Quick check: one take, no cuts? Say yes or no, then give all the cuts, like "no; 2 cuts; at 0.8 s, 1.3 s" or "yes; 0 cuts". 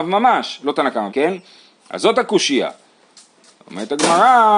no; 1 cut; at 1.1 s